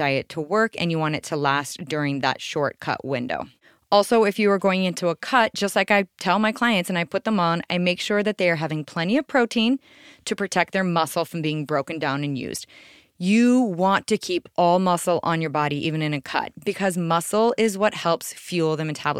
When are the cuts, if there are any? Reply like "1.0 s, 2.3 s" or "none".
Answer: none